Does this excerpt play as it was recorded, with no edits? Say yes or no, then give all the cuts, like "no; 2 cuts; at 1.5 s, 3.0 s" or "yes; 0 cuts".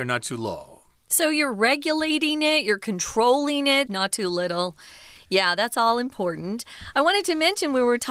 no; 1 cut; at 3.9 s